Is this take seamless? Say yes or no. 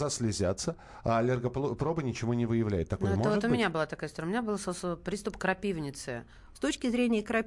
no